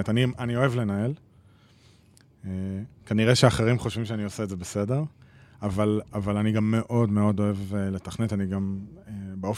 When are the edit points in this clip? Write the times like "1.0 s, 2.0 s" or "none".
none